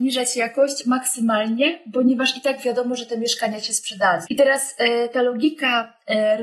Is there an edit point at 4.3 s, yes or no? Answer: yes